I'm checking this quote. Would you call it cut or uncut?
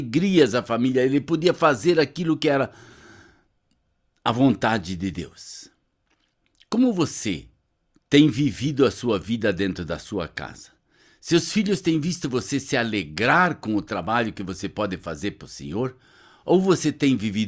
cut